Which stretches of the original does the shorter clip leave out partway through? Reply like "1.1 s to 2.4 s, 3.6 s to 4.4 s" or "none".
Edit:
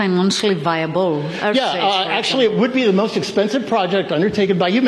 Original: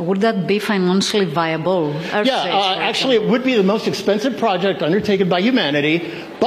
none